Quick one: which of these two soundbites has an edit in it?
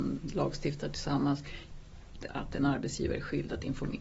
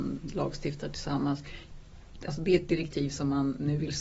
first; 1 cut; at 2.3 s

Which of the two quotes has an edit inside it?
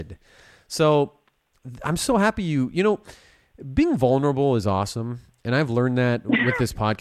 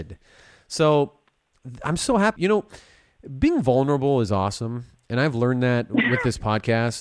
second; 1 cut; at 2.4 s

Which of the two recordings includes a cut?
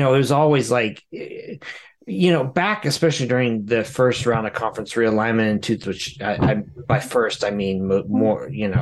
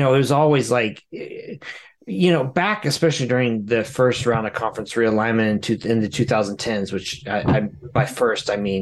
first; 1 cut; at 5.8 s

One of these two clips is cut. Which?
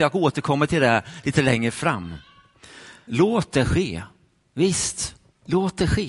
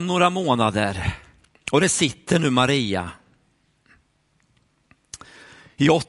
first; 1 cut; at 3.1 s

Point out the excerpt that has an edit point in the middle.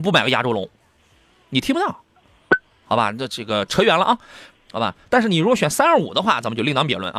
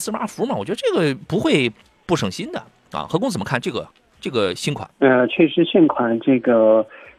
first; 1 cut; at 4.5 s

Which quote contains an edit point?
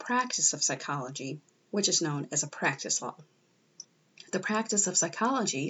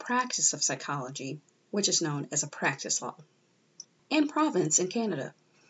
second; 1 cut; at 4.0 s

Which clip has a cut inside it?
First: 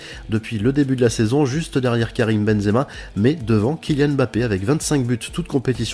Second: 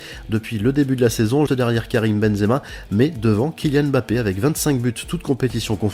second; 1 cut; at 1.5 s

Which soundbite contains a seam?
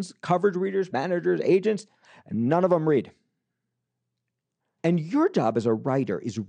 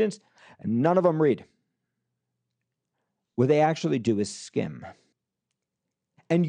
first; 2 cuts; at 0.9 s, 4.8 s

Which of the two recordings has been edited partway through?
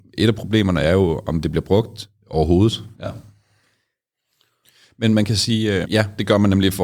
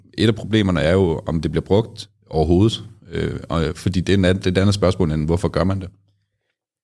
first; 2 cuts; at 2.9 s, 5.8 s

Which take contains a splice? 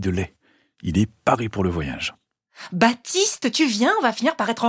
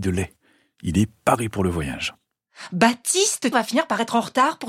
second; 1 cut; at 3.5 s

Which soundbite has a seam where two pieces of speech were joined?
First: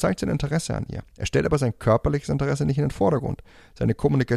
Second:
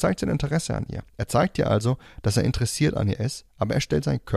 second; 1 cut; at 1.1 s

